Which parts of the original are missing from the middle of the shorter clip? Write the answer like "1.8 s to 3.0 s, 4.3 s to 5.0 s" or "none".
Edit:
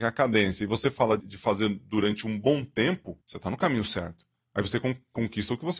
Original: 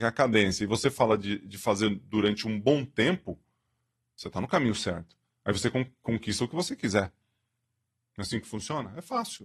1.2 s to 1.4 s, 3.4 s to 4.1 s